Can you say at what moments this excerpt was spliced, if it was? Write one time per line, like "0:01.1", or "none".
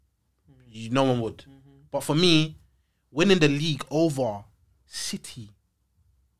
none